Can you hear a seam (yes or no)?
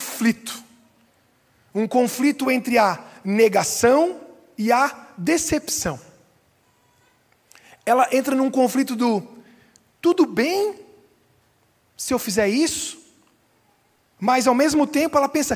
no